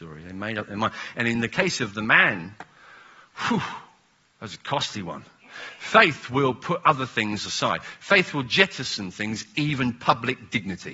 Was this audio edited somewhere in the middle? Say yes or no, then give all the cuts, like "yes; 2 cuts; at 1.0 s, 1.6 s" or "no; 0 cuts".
no; 0 cuts